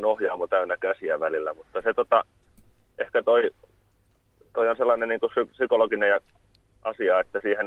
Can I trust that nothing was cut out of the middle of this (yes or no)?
yes